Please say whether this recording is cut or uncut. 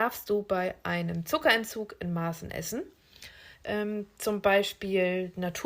cut